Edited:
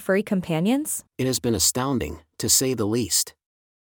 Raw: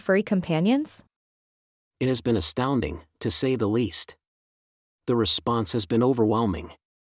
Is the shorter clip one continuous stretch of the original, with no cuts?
no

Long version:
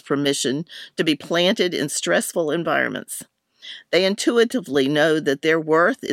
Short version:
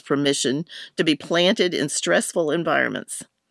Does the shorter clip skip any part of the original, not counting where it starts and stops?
no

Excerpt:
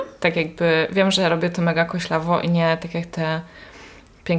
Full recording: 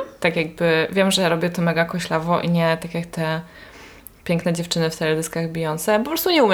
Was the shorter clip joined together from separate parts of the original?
no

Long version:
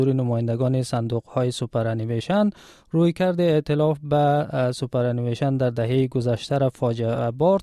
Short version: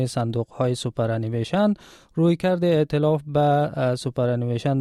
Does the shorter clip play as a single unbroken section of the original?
yes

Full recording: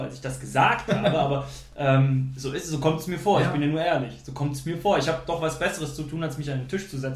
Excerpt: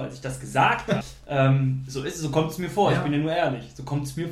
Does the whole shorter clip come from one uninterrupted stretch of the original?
no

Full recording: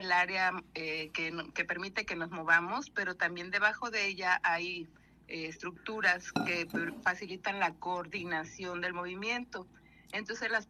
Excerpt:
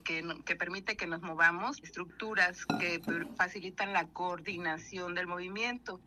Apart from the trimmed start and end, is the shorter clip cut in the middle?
yes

